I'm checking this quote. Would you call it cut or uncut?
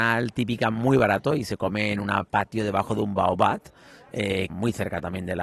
cut